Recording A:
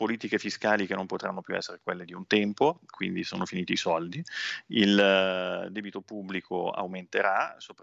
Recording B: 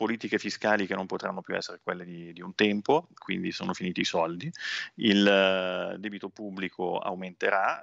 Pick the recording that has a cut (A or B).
A